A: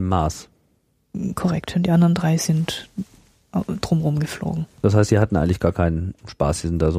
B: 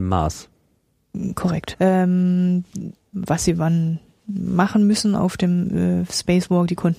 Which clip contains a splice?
B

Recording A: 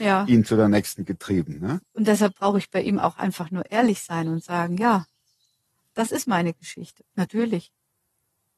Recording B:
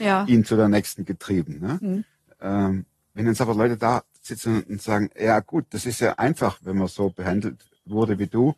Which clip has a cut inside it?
A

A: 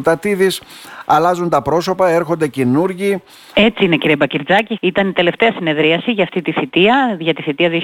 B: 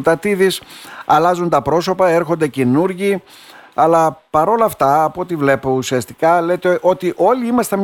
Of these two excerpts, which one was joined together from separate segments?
A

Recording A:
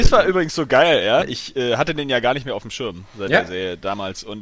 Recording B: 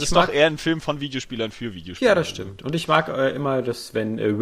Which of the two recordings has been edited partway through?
A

